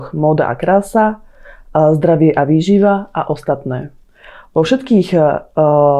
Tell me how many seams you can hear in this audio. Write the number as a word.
zero